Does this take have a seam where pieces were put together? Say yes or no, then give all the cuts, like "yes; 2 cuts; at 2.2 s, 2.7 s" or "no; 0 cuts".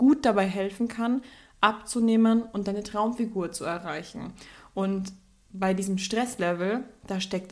no; 0 cuts